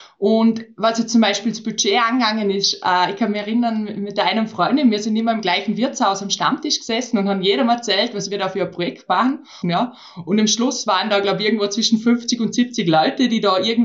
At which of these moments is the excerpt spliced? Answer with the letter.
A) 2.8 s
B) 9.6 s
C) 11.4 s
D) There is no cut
B